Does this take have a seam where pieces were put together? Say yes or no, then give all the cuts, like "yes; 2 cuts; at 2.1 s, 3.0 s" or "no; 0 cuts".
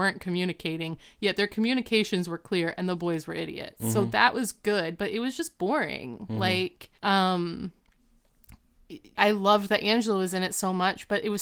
yes; 2 cuts; at 7.0 s, 9.1 s